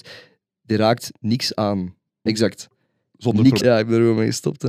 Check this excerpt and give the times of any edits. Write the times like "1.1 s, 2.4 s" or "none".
2.3 s, 3.6 s